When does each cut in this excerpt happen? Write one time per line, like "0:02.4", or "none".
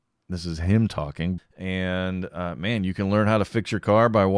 0:01.4